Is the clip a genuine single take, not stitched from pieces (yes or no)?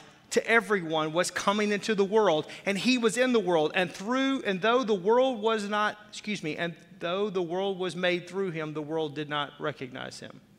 yes